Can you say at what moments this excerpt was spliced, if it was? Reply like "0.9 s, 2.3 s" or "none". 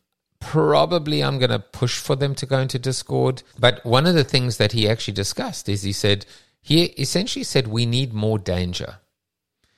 3.5 s